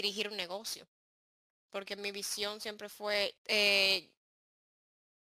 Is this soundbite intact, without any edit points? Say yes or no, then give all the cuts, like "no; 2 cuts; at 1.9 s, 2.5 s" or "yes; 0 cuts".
no; 1 cut; at 3.4 s